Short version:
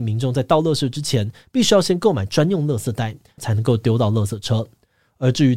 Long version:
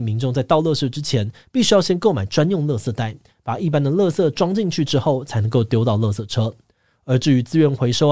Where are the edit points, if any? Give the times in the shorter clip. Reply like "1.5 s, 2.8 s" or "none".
3.4 s